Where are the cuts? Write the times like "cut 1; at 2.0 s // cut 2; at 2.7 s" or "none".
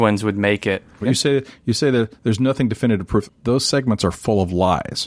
cut 1; at 1.0 s // cut 2; at 3.3 s